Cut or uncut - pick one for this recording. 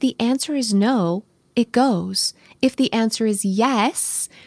uncut